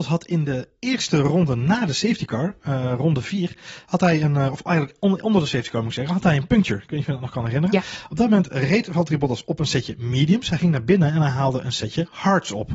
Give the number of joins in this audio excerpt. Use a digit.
0